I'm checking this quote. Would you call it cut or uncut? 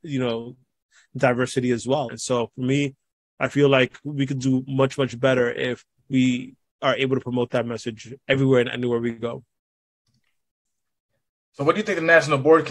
cut